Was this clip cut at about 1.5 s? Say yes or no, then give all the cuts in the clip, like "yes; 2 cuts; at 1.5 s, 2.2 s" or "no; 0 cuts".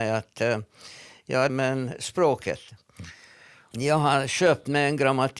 yes; 2 cuts; at 1.5 s, 3.7 s